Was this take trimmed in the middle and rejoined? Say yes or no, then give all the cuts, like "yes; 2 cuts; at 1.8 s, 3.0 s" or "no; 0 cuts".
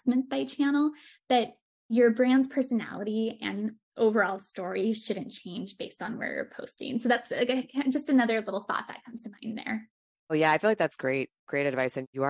no; 0 cuts